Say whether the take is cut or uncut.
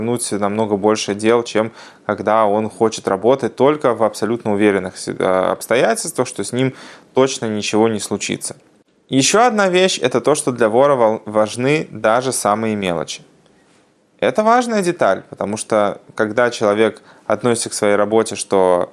uncut